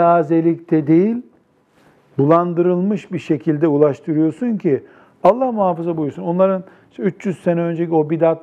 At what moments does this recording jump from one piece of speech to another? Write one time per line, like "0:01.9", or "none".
none